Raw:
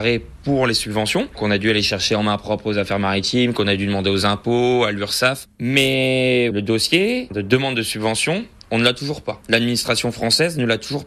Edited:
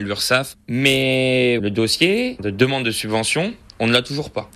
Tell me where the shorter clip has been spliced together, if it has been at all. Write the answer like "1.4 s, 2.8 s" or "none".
none

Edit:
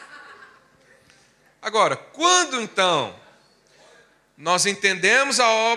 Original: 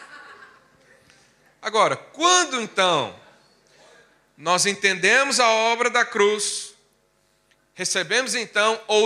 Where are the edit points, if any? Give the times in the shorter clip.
none

